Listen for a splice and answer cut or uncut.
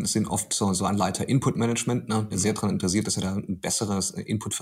cut